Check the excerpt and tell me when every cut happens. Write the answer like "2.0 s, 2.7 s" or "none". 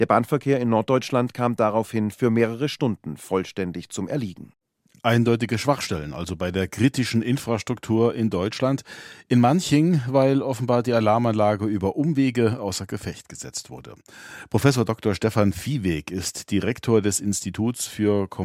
none